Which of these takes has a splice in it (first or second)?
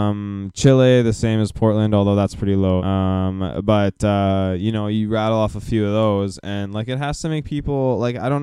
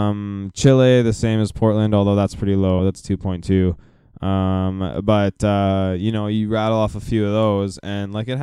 first